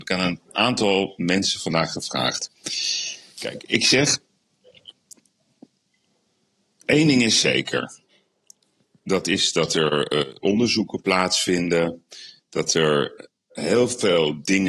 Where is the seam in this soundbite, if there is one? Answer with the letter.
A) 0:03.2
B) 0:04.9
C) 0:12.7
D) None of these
D